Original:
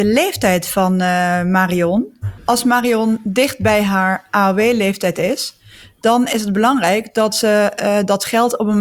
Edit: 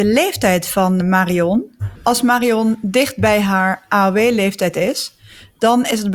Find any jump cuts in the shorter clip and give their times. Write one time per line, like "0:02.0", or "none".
0:01.0